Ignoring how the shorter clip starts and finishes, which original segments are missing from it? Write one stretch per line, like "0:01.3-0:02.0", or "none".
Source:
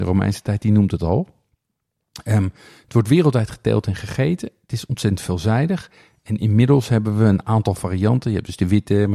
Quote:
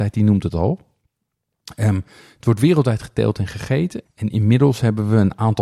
0:04.5-0:06.1